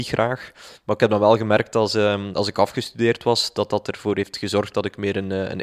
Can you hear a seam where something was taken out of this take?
no; 0 cuts

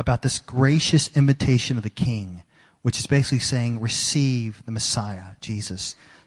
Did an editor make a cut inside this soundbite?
no; 0 cuts

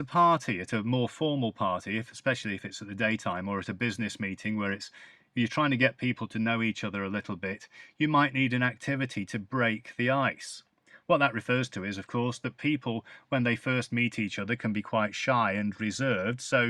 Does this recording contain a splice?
no; 0 cuts

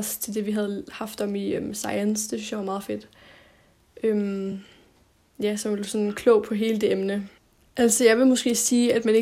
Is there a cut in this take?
no; 0 cuts

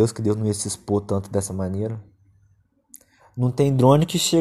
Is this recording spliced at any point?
no; 0 cuts

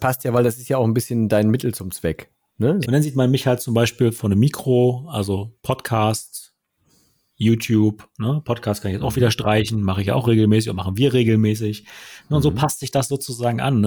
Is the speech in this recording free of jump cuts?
no; 1 cut; at 2.8 s

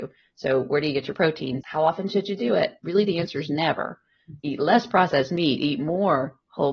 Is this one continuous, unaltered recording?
no; 2 cuts; at 1.6 s, 4.4 s

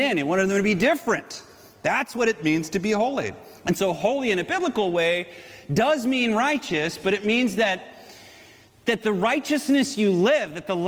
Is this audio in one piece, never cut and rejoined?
yes; 0 cuts

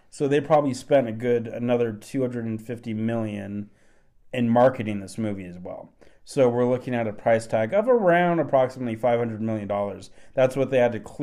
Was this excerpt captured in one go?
yes; 0 cuts

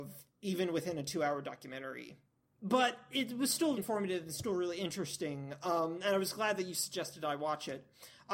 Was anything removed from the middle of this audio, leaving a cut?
yes; 1 cut; at 3.8 s

